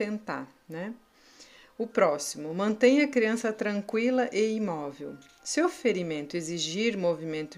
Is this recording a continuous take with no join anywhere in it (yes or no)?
yes